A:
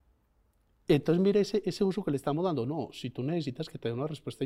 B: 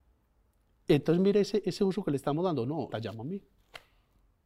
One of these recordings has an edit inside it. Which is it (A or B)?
B